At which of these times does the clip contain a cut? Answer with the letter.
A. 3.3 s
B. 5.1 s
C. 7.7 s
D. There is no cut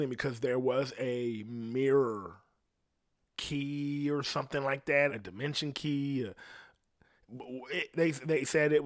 B